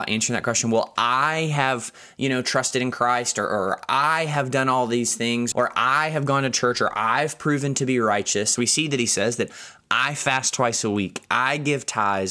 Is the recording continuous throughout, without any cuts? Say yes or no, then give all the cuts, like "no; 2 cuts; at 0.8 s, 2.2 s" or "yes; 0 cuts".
no; 2 cuts; at 5.5 s, 8.6 s